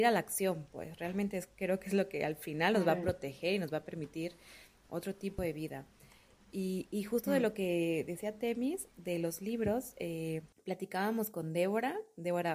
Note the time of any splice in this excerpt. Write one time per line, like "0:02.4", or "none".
0:10.5